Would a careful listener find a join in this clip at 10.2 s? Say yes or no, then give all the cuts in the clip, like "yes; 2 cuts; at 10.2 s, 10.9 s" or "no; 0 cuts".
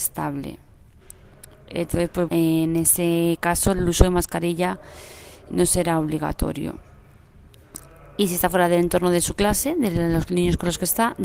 no; 2 cuts; at 2.3 s, 5.5 s